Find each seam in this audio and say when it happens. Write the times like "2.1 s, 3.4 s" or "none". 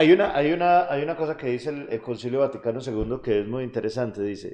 none